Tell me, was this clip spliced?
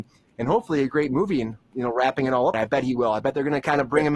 yes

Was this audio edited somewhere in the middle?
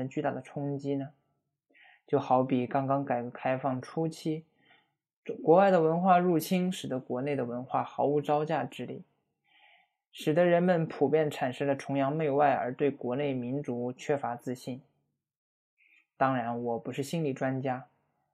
no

